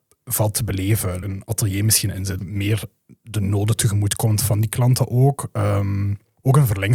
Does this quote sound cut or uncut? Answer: cut